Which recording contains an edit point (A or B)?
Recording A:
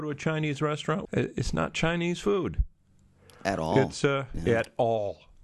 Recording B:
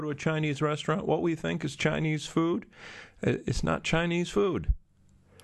A